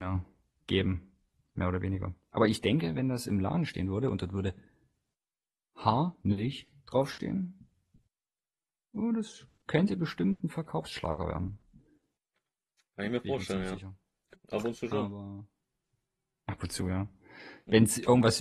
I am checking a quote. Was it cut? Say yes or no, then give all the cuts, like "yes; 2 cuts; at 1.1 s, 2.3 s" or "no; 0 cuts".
yes; 1 cut; at 14.3 s